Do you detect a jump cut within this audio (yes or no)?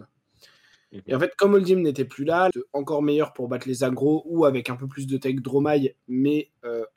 yes